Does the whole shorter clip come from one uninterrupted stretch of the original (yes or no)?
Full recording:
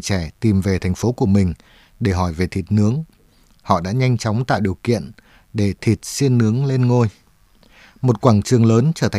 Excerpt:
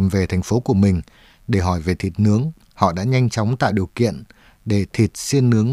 no